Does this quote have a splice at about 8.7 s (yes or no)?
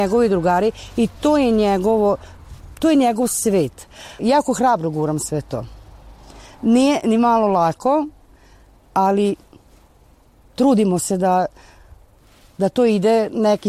no